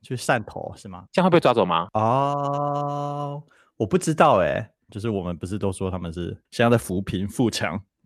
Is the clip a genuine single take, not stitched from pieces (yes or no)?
no